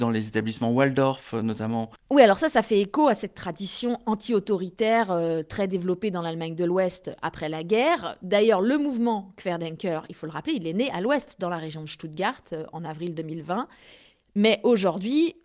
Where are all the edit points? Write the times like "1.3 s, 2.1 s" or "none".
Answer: none